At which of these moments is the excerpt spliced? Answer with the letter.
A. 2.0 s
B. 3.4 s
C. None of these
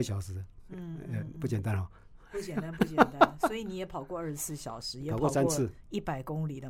C